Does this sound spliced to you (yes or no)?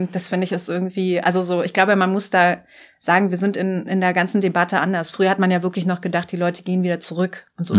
no